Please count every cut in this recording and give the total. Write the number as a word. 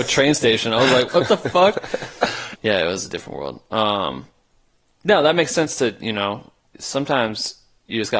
one